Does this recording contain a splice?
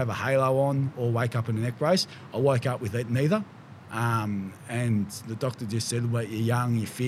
no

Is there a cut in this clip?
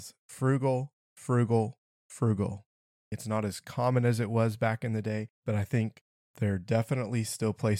yes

